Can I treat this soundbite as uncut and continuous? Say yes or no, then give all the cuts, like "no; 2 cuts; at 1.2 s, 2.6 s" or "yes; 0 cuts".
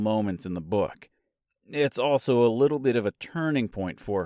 yes; 0 cuts